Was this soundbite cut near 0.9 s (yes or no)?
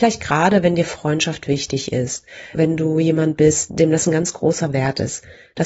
no